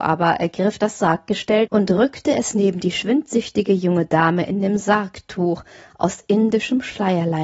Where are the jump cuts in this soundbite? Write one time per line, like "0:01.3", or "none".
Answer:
0:01.7